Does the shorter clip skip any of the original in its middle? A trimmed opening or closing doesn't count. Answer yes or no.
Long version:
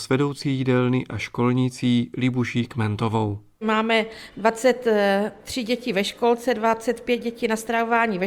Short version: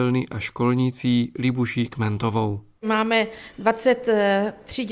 no